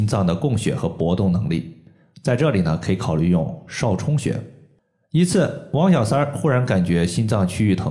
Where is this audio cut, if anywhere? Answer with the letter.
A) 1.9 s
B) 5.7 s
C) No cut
C